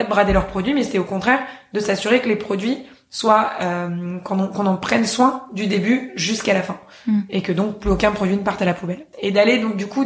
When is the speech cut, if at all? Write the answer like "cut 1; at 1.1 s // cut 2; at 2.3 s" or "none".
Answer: cut 1; at 9.1 s